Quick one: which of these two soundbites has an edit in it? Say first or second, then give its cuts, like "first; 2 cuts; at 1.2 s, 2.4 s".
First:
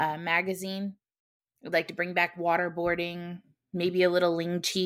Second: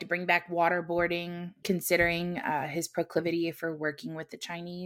second; 1 cut; at 1.6 s